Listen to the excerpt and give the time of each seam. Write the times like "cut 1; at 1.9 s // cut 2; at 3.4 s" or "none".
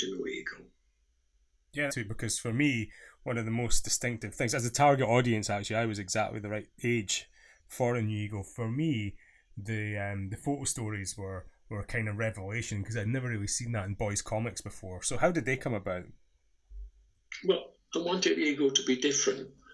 cut 1; at 1.9 s